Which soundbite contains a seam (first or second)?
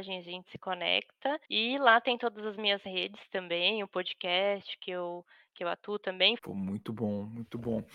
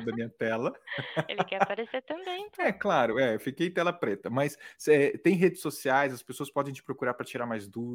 first